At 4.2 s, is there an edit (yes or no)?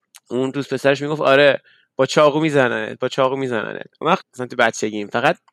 yes